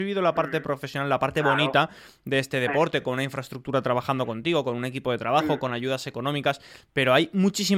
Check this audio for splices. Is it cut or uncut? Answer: uncut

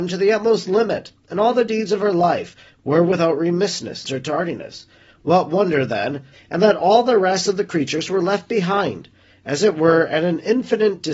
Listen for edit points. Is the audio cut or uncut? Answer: cut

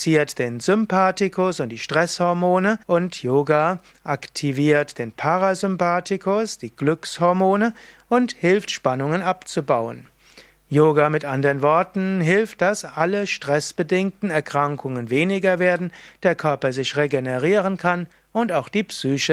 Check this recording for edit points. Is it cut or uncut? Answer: cut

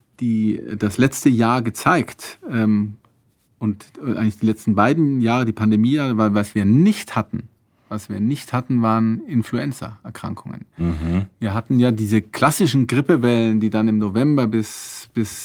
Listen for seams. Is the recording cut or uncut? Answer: uncut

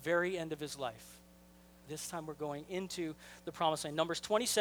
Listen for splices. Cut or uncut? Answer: cut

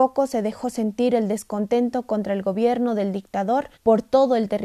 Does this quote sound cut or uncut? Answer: cut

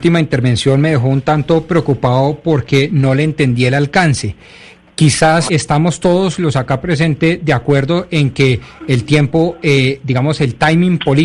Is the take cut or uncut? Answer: cut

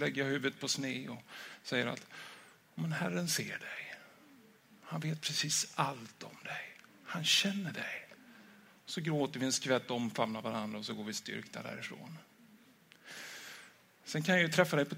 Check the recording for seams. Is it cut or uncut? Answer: uncut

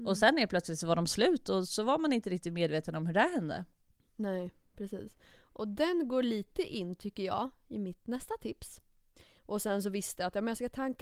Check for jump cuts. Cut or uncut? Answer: cut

